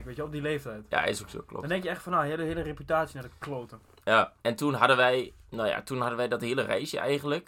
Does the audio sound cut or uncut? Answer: cut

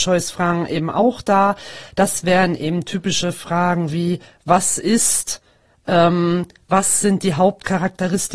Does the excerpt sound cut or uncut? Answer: uncut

